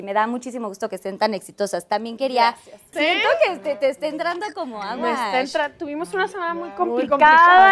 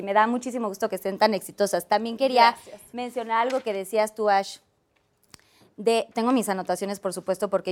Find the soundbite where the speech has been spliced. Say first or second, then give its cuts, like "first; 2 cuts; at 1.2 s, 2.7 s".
first; 1 cut; at 2.9 s